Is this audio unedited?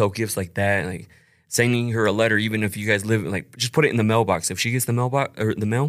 yes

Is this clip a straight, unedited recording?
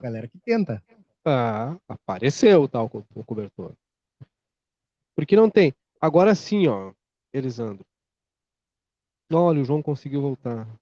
no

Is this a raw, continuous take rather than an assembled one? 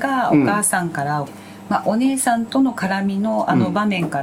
no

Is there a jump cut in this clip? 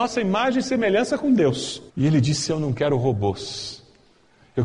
yes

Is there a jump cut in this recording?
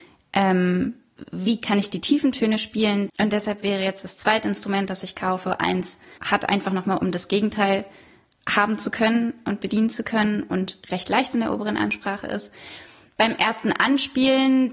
yes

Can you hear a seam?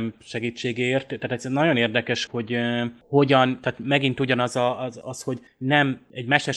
yes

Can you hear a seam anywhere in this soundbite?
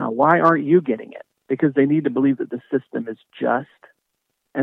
yes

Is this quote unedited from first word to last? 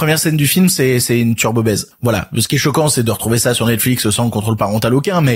yes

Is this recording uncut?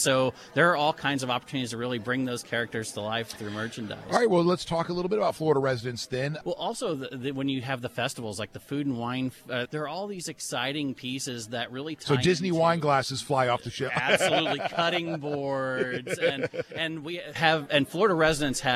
no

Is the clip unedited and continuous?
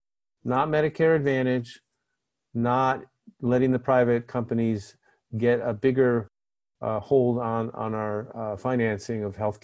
yes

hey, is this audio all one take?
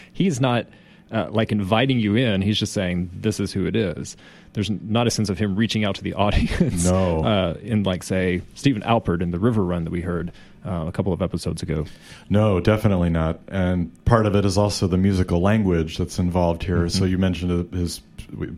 yes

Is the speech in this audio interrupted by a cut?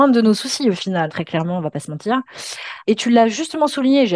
yes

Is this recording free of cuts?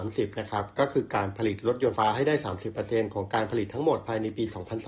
no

